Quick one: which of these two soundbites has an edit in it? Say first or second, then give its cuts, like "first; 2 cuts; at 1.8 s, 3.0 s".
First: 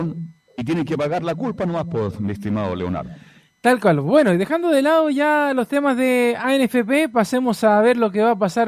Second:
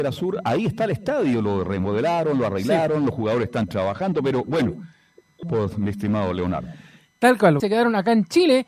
second; 2 cuts; at 5.4 s, 7.6 s